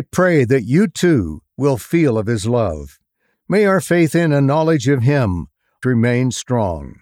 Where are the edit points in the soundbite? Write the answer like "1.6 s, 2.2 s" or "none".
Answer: 5.8 s